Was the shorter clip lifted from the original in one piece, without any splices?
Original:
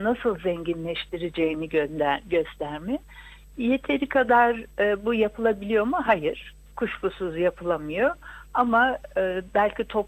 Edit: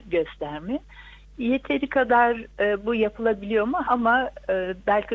no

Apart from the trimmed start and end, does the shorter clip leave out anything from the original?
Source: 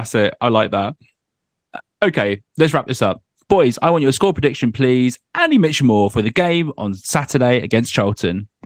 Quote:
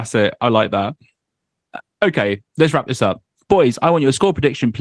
no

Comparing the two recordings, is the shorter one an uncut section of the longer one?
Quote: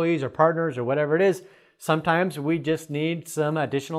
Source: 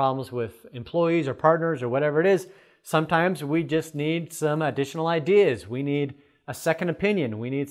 yes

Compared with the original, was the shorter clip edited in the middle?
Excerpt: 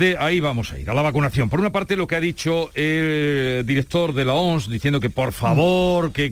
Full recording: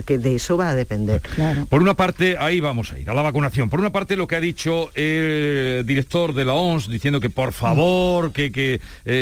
no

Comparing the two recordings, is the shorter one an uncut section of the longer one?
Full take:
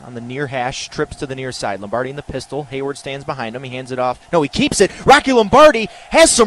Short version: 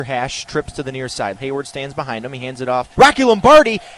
no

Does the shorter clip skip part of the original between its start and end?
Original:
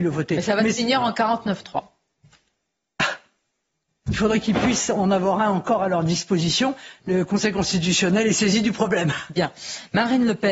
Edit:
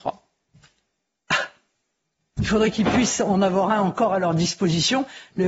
no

